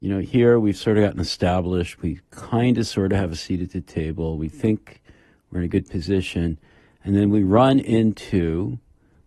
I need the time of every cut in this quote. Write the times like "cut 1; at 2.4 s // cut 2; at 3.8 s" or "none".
cut 1; at 2.0 s